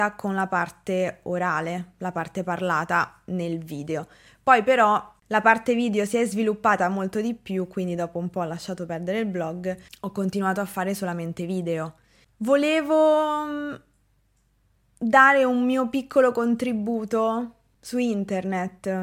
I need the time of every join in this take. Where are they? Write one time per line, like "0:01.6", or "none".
none